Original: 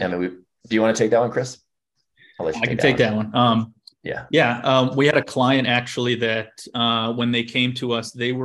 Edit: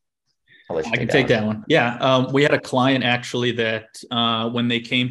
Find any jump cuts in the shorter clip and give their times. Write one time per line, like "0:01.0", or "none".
0:01.6